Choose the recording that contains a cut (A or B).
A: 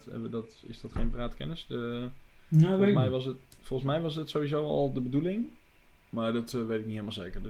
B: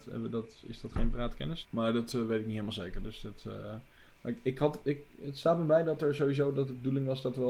B